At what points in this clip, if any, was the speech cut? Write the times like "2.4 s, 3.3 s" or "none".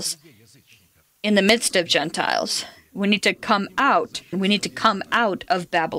4.3 s